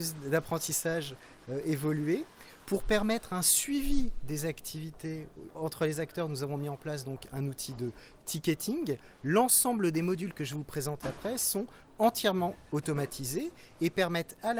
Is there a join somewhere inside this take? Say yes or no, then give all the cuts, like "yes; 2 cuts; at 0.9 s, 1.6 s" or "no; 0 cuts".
yes; 1 cut; at 11.0 s